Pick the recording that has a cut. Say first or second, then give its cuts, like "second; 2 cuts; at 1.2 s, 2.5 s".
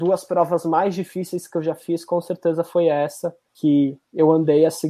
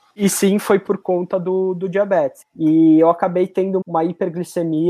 second; 2 cuts; at 2.4 s, 3.8 s